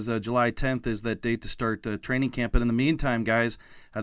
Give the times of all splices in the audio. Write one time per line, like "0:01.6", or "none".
none